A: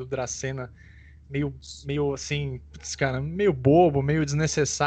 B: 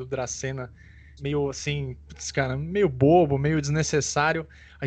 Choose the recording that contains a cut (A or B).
B